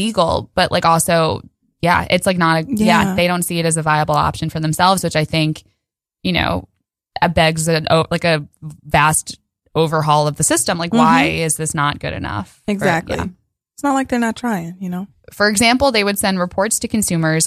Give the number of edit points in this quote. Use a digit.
1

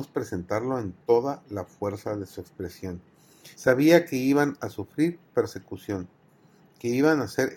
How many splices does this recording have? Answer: 1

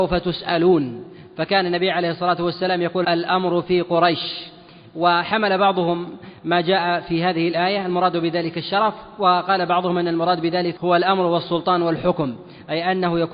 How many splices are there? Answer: 2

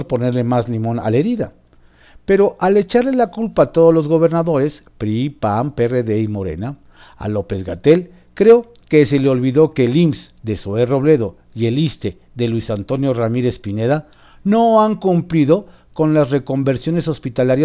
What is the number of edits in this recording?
0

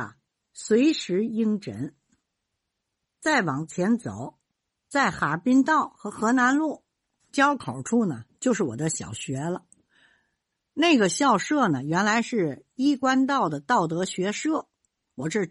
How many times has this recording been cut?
0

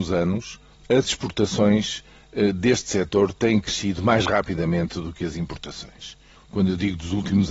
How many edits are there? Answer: 1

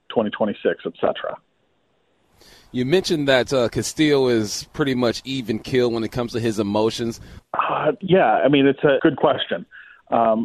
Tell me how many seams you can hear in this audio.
2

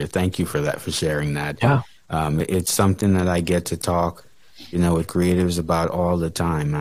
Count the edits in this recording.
0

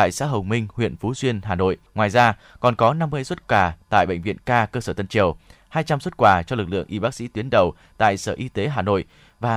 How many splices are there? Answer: 1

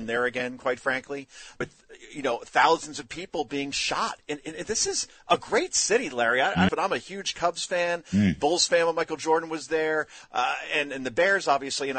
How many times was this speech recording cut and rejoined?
2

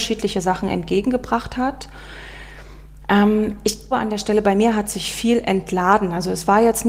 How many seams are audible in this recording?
1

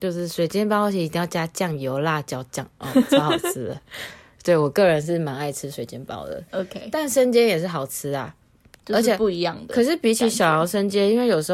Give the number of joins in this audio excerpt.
0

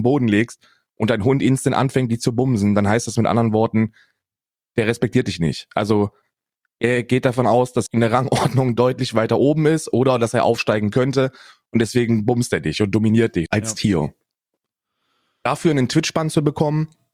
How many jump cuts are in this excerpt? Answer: 2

